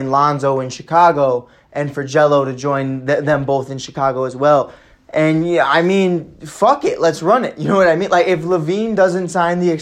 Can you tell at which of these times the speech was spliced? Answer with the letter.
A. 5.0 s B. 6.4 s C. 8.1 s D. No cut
D